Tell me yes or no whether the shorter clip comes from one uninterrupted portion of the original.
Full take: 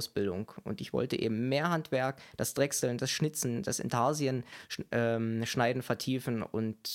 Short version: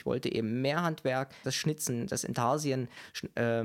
no